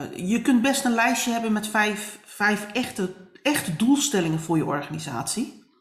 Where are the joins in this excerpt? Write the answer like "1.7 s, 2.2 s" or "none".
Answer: none